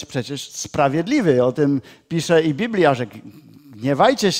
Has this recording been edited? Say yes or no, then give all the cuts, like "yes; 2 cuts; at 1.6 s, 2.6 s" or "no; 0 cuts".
no; 0 cuts